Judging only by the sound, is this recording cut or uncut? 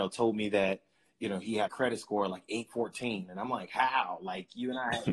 cut